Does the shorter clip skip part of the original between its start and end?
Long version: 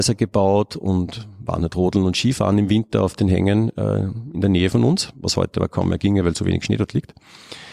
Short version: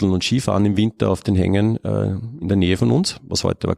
no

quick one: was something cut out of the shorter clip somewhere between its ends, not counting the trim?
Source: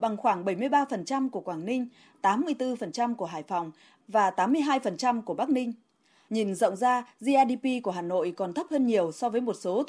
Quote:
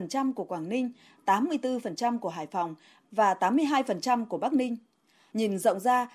no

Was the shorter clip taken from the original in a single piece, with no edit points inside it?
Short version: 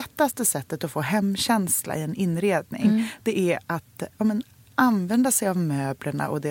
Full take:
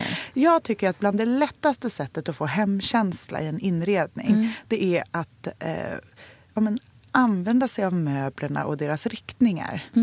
no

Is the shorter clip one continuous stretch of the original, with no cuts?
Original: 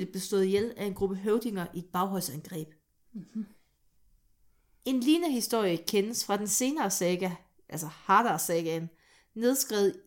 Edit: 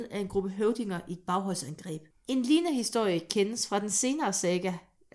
no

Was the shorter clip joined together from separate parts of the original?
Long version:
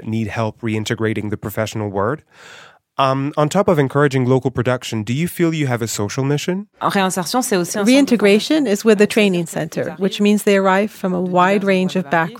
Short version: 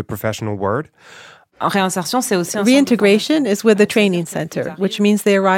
yes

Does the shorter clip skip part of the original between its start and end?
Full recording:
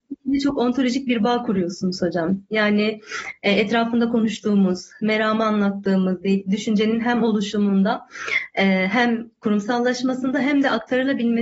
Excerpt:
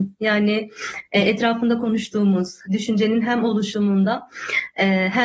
yes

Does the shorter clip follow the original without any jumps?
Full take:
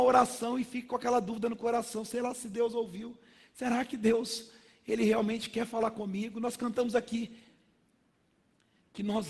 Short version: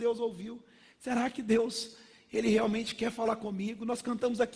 yes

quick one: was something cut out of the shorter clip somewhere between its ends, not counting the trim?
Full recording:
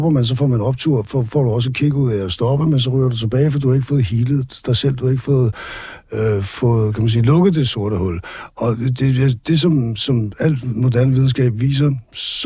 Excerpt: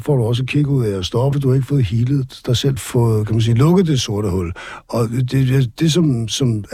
yes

